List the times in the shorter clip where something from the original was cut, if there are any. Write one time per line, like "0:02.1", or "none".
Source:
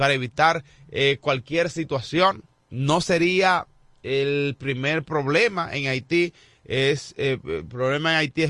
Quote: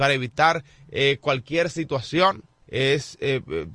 0:02.6

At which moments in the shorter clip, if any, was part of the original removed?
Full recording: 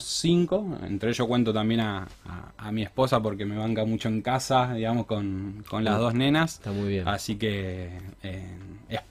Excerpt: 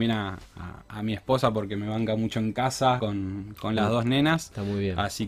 0:03.0

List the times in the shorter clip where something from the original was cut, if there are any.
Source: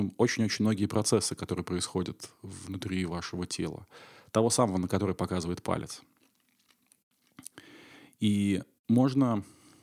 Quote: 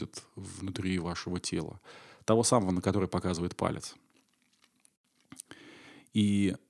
none

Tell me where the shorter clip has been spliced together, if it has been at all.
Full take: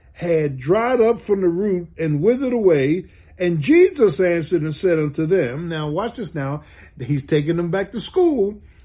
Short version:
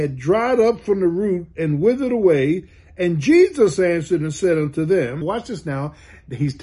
0:05.2

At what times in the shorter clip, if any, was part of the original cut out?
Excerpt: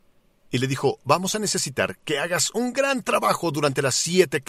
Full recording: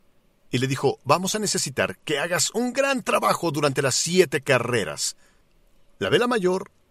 none

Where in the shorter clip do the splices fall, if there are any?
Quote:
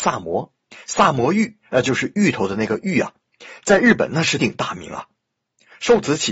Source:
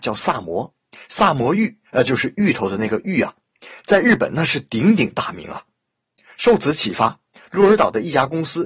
0:04.4

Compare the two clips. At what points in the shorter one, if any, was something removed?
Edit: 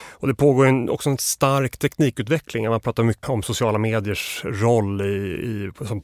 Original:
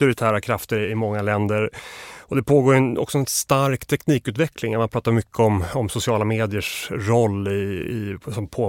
0:03.2

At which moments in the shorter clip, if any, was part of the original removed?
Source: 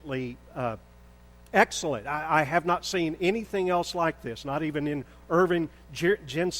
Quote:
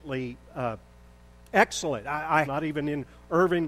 0:02.4

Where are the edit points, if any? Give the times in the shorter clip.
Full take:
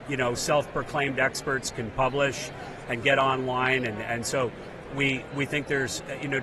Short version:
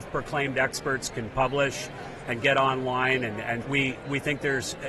0:03.6

